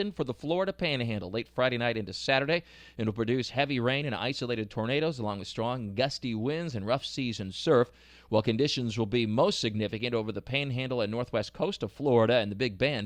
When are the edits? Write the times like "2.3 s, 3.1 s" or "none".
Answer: none